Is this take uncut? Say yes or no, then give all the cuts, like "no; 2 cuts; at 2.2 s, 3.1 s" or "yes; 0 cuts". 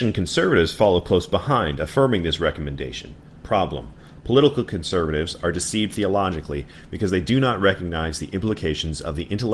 yes; 0 cuts